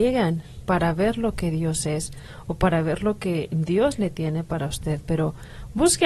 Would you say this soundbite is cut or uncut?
uncut